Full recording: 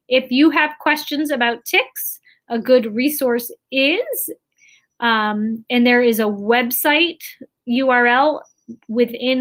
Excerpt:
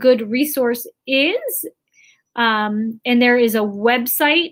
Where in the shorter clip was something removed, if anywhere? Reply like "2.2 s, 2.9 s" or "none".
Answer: none